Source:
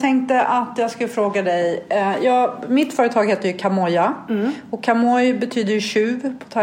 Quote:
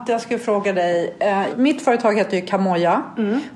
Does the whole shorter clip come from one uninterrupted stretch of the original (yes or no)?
no